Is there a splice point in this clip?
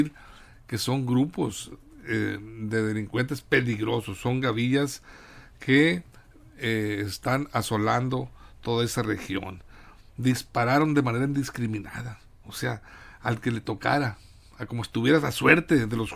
no; 0 cuts

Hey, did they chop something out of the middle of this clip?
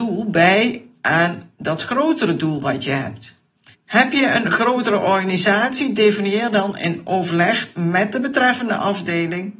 yes; 1 cut; at 3.7 s

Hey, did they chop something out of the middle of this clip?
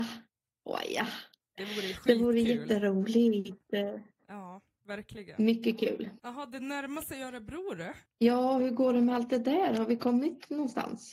yes; 1 cut; at 1.4 s

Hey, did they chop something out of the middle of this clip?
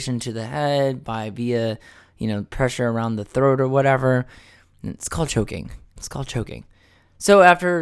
yes; 1 cut; at 6.0 s

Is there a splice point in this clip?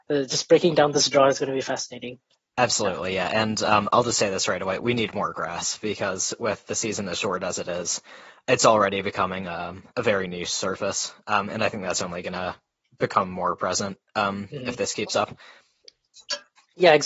no; 0 cuts

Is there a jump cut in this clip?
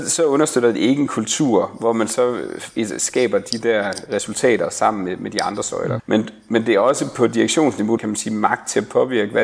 yes; 2 cuts; at 6.0 s, 8.0 s

